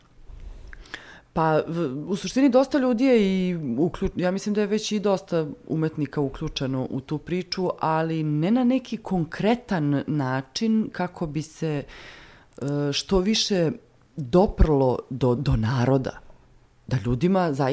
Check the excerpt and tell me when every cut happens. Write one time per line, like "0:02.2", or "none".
0:15.4